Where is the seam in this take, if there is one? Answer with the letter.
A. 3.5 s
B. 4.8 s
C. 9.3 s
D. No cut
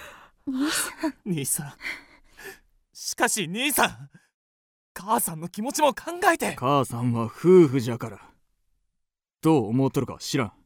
D